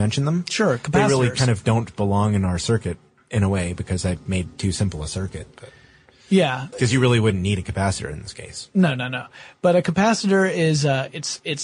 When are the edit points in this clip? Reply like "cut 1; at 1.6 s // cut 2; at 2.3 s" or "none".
cut 1; at 6.7 s